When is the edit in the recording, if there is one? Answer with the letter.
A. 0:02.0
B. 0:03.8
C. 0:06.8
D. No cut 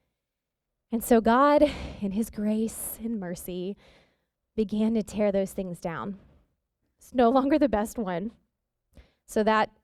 C